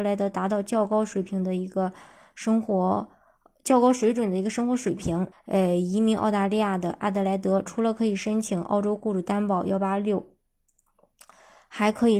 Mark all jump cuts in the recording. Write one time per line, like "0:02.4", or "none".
0:05.3